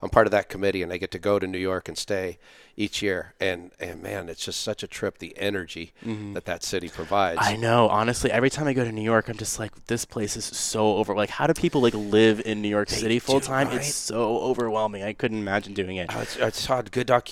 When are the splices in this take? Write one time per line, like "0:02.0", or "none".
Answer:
none